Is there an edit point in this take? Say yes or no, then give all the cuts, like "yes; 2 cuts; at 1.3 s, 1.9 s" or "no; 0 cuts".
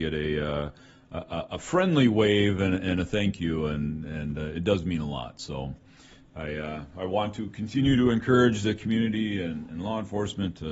no; 0 cuts